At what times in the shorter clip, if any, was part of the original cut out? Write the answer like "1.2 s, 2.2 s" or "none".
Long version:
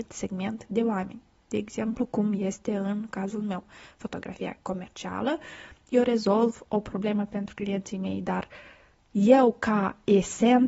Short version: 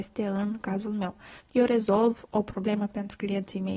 1.4 s